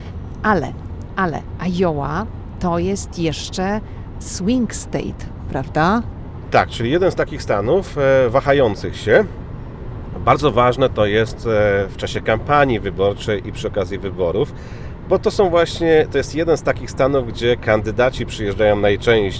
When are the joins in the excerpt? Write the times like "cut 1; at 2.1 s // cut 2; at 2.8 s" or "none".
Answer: none